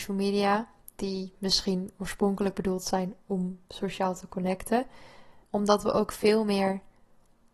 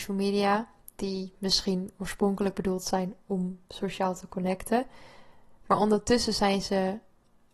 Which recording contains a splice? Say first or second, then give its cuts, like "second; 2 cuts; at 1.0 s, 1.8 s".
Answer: first; 1 cut; at 5.4 s